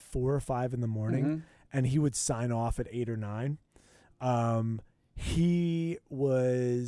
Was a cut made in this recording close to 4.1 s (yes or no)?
no